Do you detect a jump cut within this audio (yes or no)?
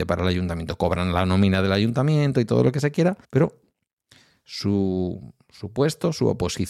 yes